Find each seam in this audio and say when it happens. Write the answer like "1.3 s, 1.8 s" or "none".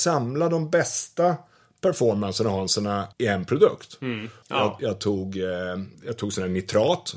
3.1 s, 4.4 s, 5.9 s